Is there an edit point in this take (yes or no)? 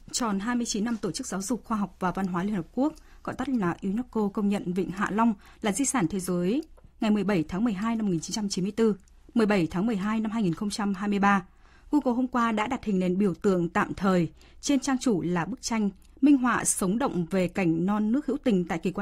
no